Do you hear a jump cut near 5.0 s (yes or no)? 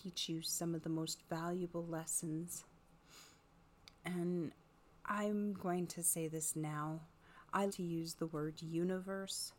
no